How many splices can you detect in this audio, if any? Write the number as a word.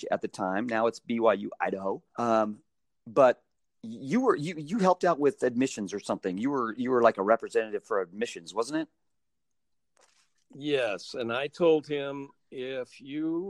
one